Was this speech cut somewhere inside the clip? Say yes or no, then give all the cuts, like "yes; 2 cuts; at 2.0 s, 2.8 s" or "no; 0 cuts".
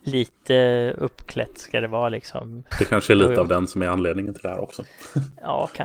yes; 1 cut; at 2.7 s